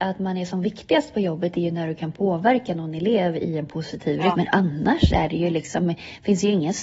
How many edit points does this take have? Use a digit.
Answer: 1